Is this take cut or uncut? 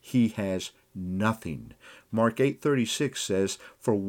uncut